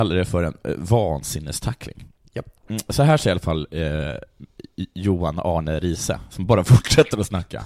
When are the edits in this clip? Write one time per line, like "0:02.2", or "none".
none